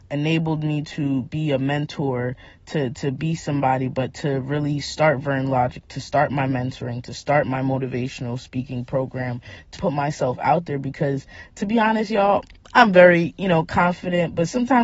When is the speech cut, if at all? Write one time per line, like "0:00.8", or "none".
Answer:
0:09.8